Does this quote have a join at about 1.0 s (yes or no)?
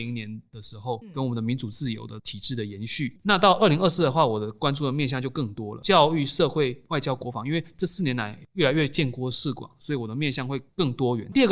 yes